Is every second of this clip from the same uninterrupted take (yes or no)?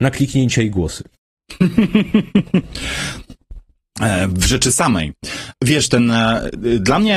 yes